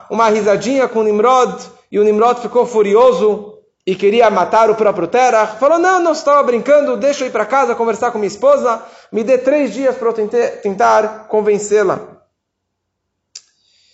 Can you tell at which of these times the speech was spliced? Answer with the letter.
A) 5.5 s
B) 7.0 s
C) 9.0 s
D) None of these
D